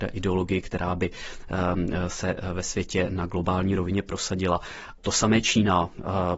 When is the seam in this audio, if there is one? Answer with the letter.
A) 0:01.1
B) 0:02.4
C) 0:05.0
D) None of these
C